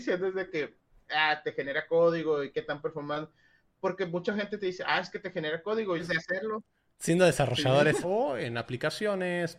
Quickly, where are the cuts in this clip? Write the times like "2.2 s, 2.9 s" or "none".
6.0 s, 8.0 s